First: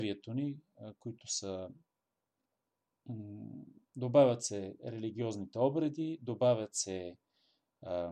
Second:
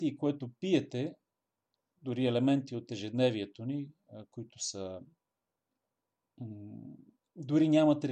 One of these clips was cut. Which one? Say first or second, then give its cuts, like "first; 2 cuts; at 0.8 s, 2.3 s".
first; 1 cut; at 3.9 s